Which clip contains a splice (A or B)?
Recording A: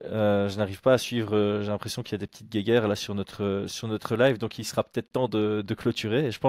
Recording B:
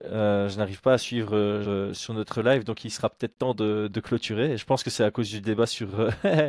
B